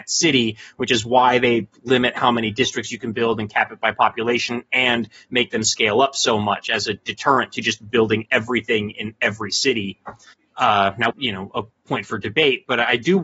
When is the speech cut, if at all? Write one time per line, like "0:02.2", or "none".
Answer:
0:11.1